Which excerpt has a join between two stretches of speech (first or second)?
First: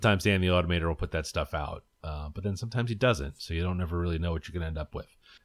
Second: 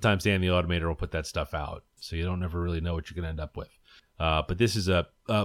second